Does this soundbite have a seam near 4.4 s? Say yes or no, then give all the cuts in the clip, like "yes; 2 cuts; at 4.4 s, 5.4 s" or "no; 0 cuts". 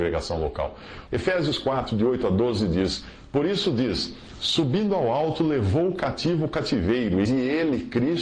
no; 2 cuts; at 1.1 s, 7.2 s